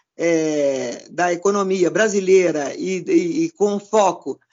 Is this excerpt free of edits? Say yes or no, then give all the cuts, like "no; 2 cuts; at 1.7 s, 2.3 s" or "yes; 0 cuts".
yes; 0 cuts